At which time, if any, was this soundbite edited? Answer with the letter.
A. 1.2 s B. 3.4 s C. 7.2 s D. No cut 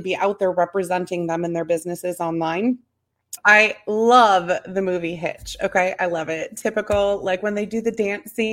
B